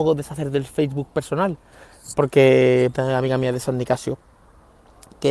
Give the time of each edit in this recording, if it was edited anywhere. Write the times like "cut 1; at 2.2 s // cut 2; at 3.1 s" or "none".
cut 1; at 2.9 s